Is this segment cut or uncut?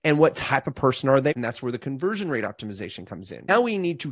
cut